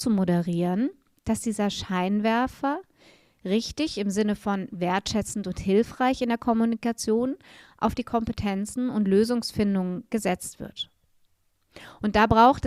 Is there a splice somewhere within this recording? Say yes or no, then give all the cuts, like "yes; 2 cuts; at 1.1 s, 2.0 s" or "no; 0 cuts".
no; 0 cuts